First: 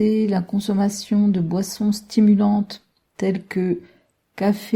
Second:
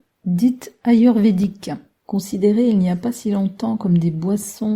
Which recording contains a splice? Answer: second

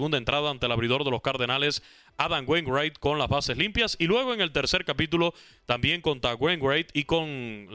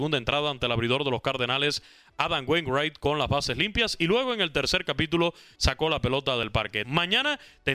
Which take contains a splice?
second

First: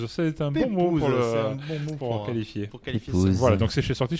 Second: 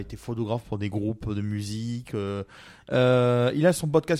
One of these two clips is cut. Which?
second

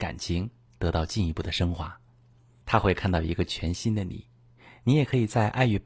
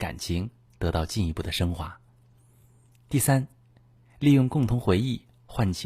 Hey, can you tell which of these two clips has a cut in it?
first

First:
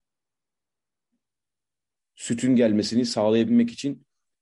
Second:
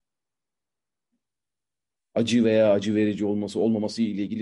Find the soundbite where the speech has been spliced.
second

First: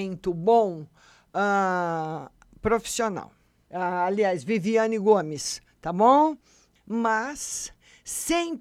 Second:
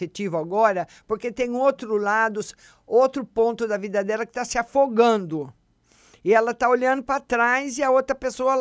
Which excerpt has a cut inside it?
first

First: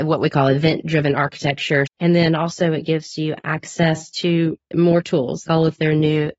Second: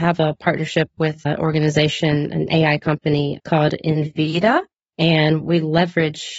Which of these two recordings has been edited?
first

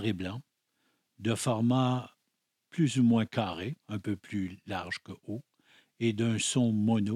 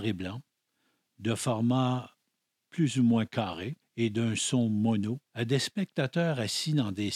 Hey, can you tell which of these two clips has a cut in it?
second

